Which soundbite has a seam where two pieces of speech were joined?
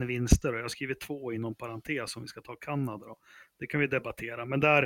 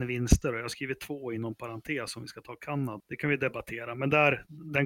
second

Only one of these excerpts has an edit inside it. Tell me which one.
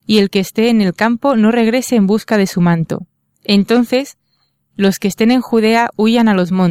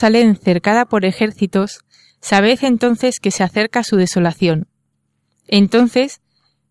first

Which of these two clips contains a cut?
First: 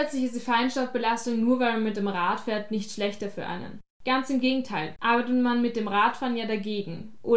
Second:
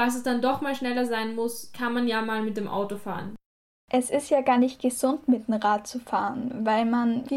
first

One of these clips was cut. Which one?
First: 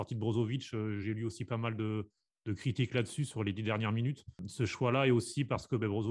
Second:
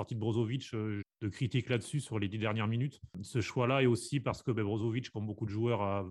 second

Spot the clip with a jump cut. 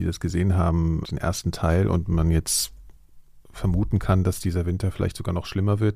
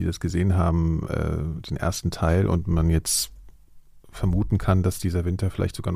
first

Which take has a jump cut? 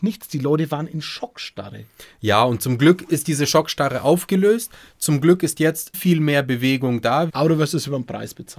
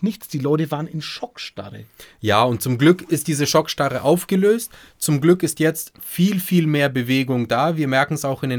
first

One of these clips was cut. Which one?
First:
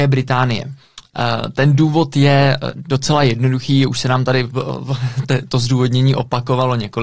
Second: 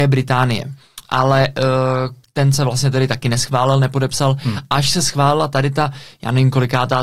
first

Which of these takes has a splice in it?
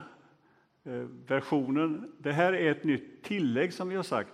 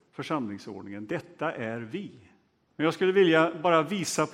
second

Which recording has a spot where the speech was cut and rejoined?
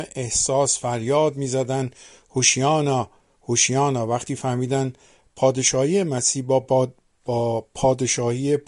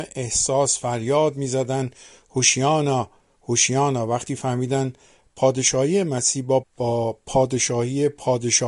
second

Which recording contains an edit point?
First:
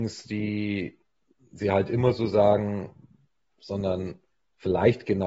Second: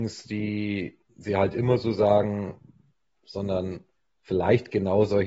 second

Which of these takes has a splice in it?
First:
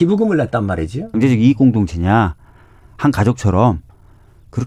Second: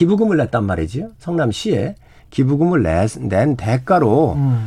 first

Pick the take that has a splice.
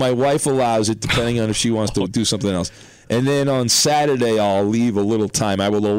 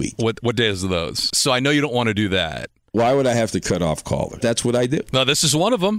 second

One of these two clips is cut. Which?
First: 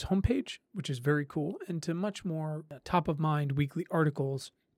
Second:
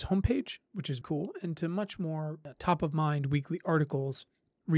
second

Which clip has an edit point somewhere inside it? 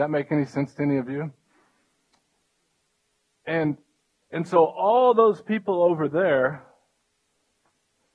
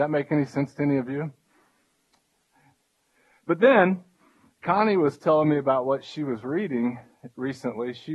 second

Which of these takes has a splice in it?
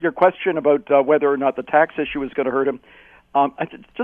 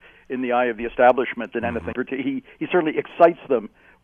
second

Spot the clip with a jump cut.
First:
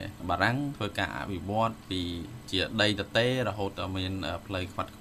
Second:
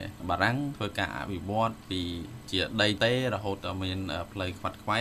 second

